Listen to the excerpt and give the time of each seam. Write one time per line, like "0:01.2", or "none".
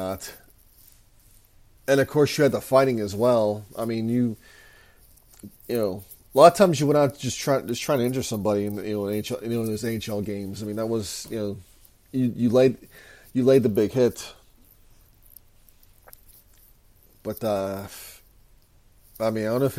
none